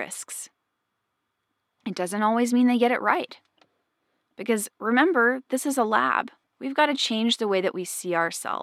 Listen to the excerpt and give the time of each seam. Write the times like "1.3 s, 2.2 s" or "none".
6.4 s